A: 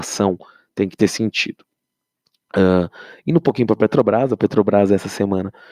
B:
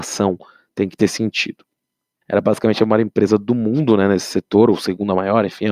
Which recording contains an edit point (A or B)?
B